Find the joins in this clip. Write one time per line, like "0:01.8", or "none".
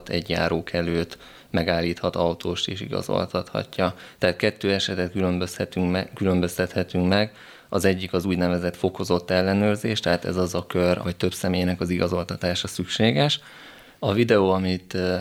0:11.0
0:13.9